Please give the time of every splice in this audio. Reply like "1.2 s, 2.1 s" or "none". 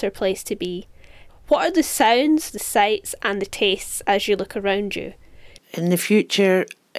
1.3 s, 2.5 s, 5.6 s

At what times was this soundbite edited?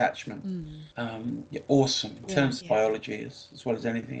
0.9 s, 2.6 s

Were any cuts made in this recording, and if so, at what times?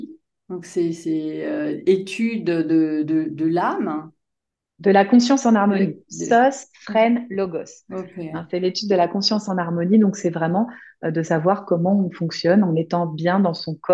none

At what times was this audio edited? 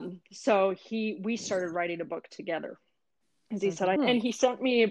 4.0 s

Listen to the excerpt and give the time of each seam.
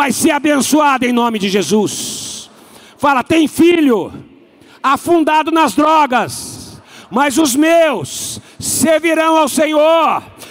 none

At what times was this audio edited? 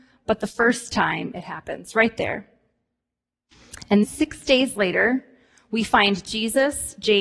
4.0 s

